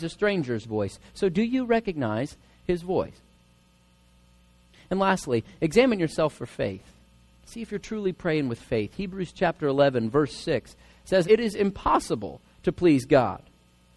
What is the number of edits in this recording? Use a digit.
1